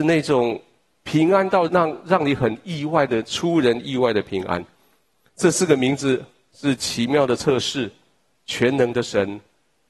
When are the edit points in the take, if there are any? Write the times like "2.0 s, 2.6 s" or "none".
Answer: 1.7 s